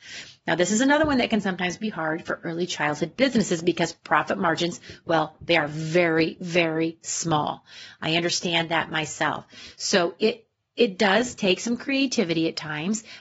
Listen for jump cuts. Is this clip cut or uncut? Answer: uncut